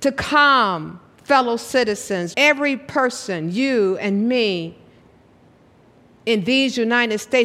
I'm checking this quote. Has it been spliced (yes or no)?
yes